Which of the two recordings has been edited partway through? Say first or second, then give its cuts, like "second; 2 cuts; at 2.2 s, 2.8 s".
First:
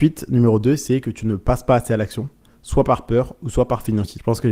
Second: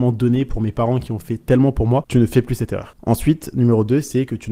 second; 1 cut; at 2.0 s